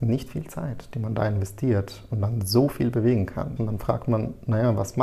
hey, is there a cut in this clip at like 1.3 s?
no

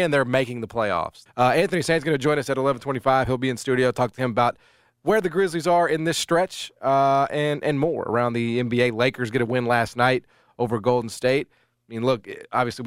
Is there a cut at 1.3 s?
yes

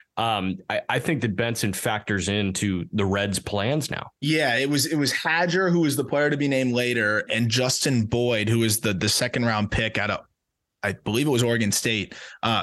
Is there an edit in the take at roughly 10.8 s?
no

